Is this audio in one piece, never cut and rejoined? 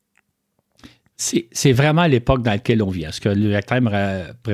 yes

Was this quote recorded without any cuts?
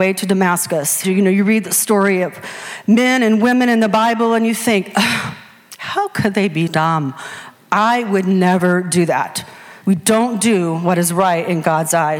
no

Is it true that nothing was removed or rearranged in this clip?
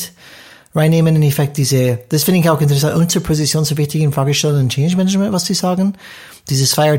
yes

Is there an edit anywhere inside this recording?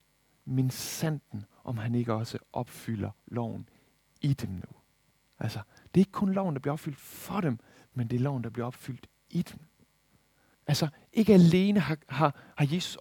yes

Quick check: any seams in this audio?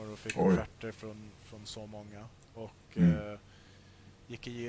no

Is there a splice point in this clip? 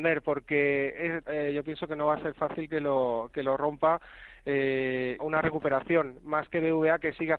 yes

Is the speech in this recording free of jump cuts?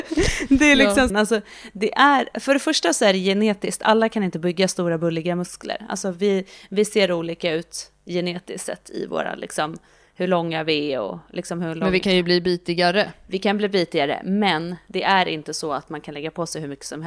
no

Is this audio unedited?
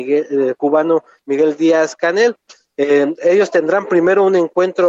yes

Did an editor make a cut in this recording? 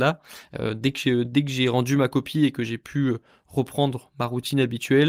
no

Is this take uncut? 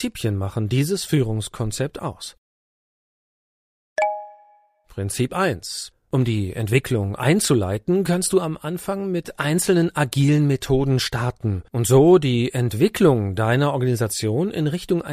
no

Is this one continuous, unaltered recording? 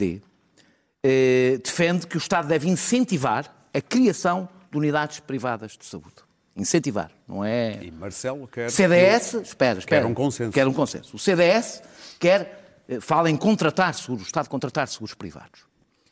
yes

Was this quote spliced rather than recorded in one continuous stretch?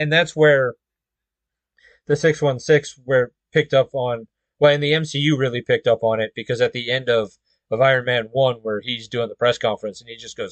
no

